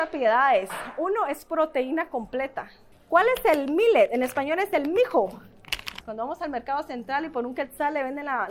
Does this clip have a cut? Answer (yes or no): yes